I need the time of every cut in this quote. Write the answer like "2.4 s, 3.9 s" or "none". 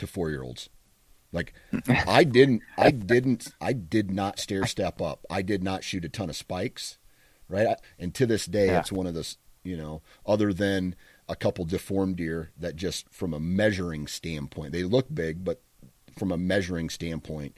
7.8 s